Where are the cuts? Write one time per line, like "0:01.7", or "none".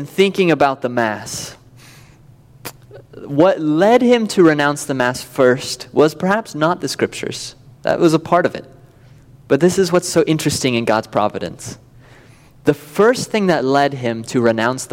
none

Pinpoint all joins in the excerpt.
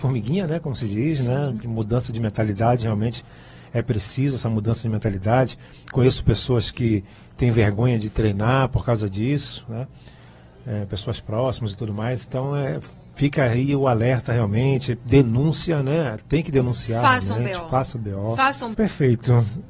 0:18.7

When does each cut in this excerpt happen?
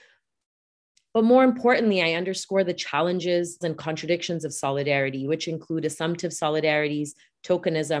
0:03.6

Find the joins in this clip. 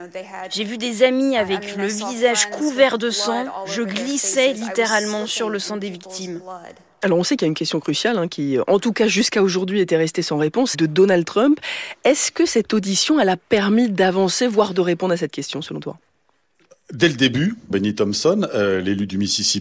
0:10.7
0:17.7

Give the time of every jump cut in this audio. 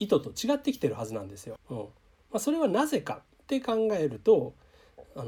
0:01.6

